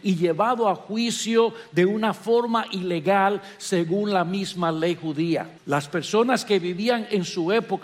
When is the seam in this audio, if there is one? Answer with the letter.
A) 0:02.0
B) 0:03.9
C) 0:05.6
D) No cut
C